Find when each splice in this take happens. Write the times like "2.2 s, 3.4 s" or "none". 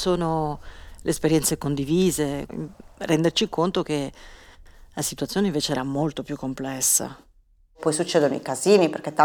2.5 s